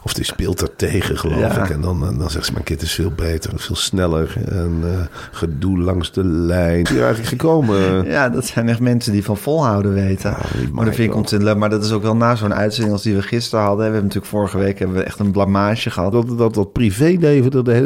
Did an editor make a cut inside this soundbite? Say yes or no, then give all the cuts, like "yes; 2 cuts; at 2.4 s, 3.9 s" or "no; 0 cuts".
yes; 3 cuts; at 3.5 s, 6.9 s, 16.1 s